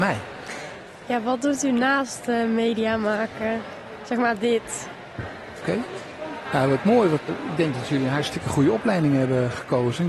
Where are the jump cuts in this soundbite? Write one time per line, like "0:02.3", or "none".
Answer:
0:05.6
0:07.3